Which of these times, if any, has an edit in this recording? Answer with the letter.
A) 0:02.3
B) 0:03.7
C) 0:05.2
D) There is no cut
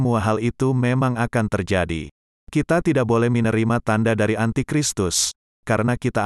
D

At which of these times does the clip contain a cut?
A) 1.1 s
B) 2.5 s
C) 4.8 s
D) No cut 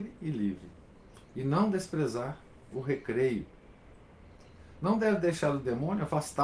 D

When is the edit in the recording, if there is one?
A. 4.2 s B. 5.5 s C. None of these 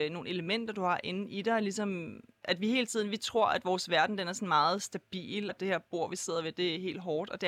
B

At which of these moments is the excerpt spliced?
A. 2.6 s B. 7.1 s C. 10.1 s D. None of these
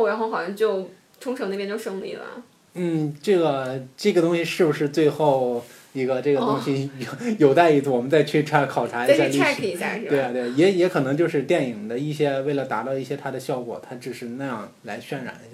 D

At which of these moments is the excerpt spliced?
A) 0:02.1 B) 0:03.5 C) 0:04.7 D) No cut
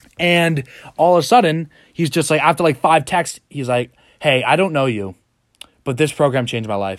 D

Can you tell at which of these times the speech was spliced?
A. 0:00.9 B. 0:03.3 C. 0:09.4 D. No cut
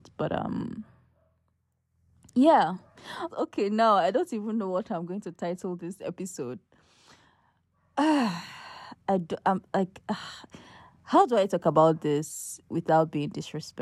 B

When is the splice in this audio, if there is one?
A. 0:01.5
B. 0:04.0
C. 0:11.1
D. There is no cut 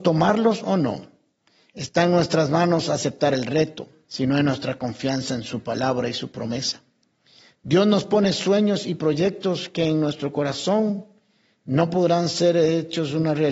B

